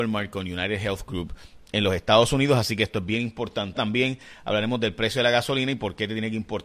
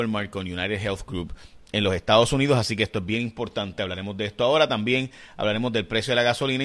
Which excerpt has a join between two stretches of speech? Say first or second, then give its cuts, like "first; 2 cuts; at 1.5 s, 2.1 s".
first; 1 cut; at 3.7 s